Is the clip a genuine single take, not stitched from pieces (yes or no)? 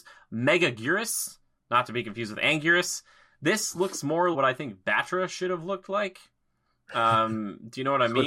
no